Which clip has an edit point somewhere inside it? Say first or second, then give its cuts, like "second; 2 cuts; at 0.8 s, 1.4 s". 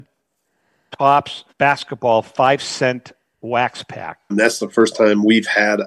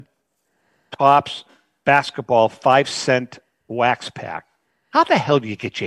first; 2 cuts; at 1.5 s, 4.3 s